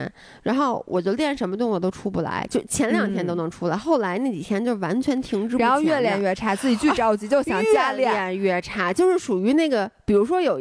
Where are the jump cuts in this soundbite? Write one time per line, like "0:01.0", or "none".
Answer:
none